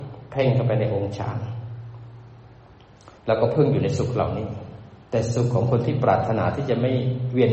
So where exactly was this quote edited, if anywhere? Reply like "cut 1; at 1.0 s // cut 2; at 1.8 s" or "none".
cut 1; at 3.2 s // cut 2; at 5.0 s